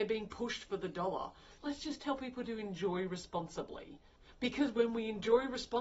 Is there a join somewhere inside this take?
yes; 1 cut; at 1.6 s

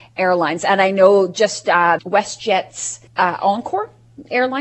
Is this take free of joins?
no; 2 cuts; at 2.0 s, 3.1 s

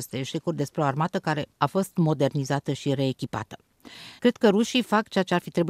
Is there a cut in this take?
yes; 2 cuts; at 1.5 s, 4.2 s

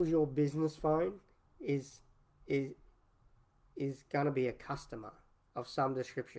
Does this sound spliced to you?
no; 0 cuts

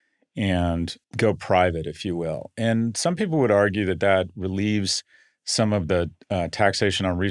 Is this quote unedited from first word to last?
no; 1 cut; at 1.0 s

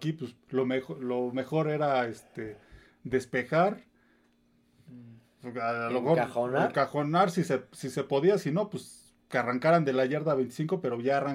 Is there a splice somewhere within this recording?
no; 0 cuts

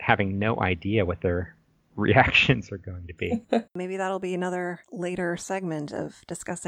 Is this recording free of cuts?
no; 2 cuts; at 3.7 s, 4.8 s

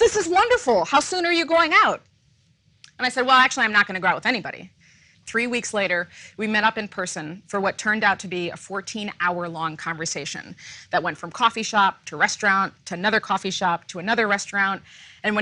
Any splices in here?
yes; 1 cut; at 5.1 s

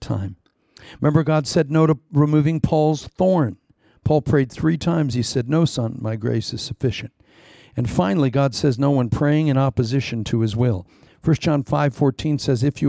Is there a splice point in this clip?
no; 0 cuts

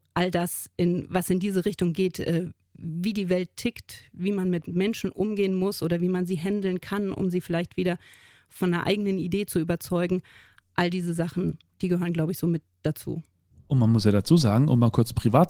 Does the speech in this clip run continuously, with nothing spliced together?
yes; 0 cuts

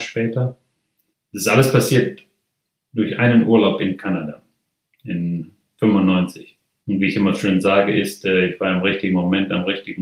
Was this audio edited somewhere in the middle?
no; 0 cuts

